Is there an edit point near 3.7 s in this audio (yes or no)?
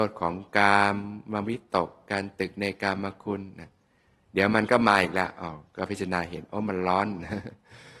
no